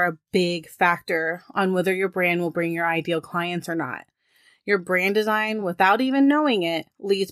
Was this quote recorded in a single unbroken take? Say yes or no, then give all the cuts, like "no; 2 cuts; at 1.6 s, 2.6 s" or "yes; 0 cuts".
yes; 0 cuts